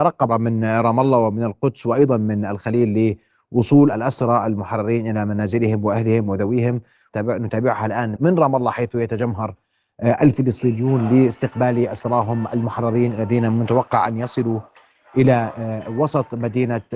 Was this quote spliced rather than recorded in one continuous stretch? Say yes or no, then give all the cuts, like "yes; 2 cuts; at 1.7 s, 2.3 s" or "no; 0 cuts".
yes; 1 cut; at 8.2 s